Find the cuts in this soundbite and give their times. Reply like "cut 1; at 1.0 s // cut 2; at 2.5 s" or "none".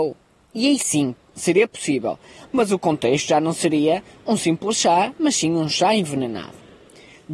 none

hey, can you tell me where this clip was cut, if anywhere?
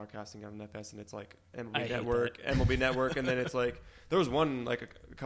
none

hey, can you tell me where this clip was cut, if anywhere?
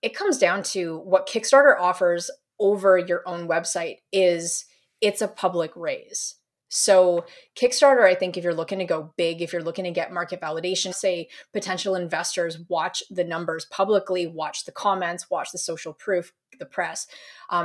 cut 1; at 10.9 s

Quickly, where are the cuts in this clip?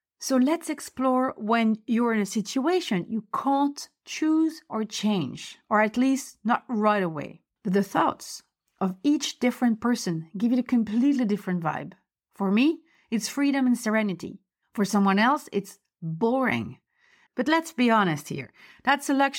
cut 1; at 7.6 s // cut 2; at 17.3 s

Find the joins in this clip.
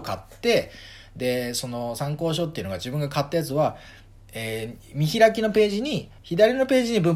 cut 1; at 6.2 s

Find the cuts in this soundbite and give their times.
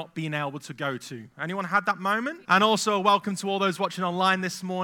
cut 1; at 2.4 s

